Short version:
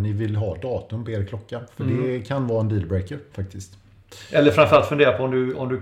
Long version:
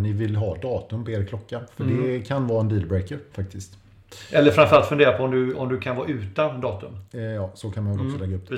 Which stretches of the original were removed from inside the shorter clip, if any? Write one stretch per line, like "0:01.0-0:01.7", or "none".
none